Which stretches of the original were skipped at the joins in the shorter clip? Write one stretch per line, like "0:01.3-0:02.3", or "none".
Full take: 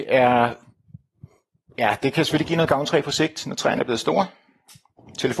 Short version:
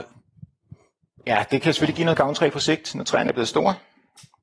none